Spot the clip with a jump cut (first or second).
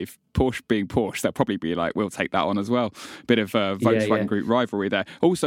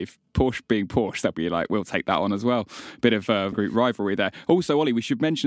second